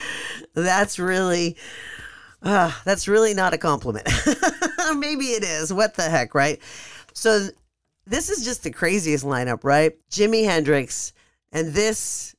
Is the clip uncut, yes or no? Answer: no